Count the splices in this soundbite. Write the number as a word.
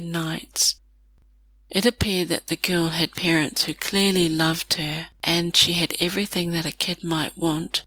zero